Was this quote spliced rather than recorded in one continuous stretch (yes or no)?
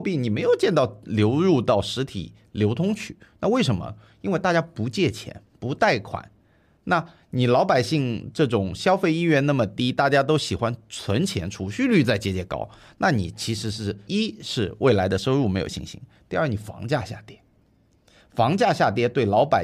yes